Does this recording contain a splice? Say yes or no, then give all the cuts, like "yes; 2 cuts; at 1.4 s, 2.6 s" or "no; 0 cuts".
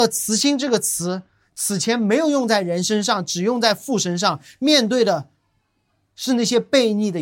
no; 0 cuts